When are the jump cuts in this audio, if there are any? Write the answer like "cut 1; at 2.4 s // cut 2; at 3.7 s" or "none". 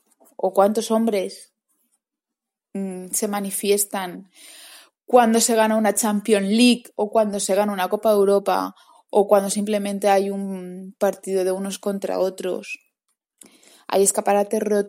none

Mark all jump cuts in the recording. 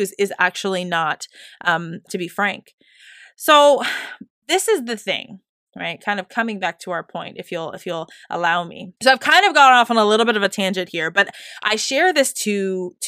cut 1; at 2.1 s // cut 2; at 9.0 s

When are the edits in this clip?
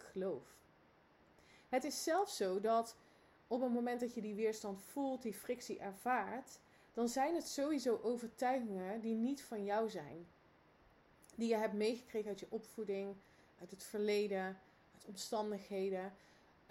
none

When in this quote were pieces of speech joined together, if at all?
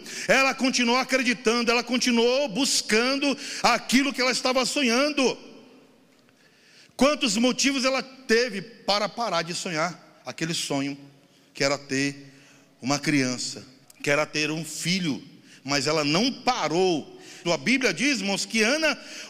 cut 1; at 13.8 s // cut 2; at 17.4 s

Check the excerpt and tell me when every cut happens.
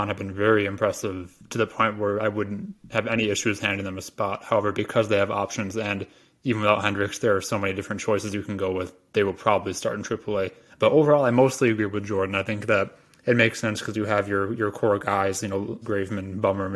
cut 1; at 10.7 s // cut 2; at 15.8 s

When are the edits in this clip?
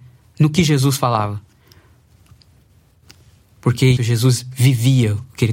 cut 1; at 4.0 s

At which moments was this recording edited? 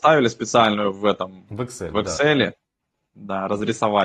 none

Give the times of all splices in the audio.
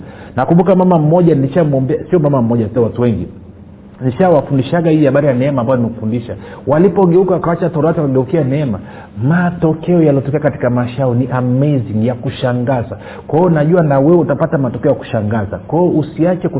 cut 1; at 2.8 s

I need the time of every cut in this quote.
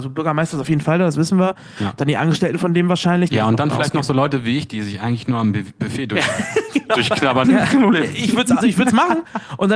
cut 1; at 3.3 s // cut 2; at 7.4 s // cut 3; at 8.6 s

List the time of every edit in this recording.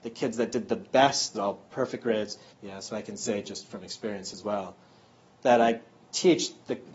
cut 1; at 1.3 s // cut 2; at 2.5 s

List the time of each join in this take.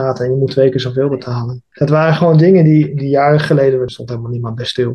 cut 1; at 1.7 s // cut 2; at 3.9 s

